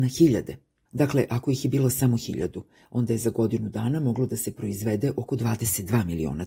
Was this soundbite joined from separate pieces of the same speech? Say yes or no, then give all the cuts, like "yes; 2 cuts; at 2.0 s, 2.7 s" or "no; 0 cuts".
no; 0 cuts